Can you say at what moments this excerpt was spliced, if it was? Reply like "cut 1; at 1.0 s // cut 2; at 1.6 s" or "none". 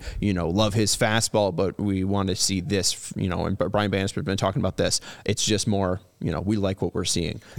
none

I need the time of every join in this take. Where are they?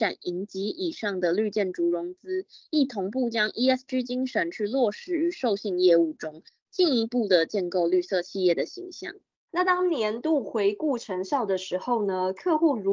cut 1; at 9.3 s

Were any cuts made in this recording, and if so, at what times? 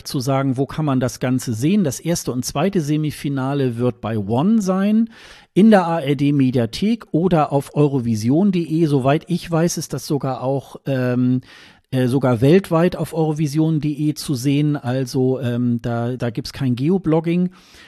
cut 1; at 16.2 s

